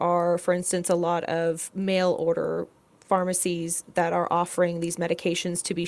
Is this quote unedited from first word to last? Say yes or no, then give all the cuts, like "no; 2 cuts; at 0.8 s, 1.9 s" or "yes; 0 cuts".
yes; 0 cuts